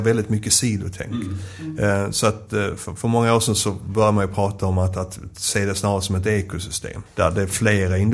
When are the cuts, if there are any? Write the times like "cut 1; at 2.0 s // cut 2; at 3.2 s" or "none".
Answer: cut 1; at 7.1 s